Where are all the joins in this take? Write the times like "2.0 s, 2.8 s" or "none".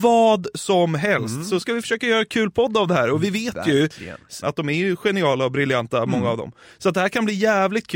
4.4 s